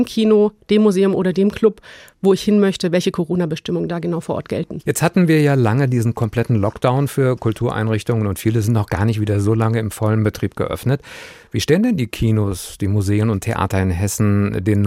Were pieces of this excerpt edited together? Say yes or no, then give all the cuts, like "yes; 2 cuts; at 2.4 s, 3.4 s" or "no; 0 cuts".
no; 0 cuts